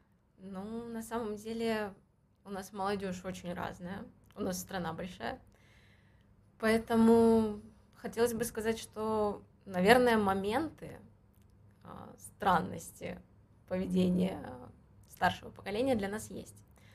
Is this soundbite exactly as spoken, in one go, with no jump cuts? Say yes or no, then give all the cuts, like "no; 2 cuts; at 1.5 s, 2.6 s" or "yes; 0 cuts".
yes; 0 cuts